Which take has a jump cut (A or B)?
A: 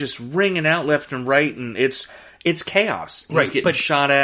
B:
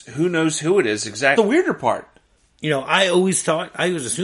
B